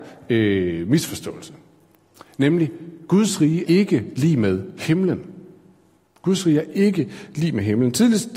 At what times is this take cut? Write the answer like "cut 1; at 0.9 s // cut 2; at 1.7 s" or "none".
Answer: cut 1; at 3.7 s